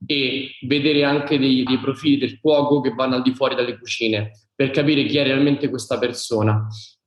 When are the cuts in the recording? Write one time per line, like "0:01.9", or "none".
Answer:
0:01.7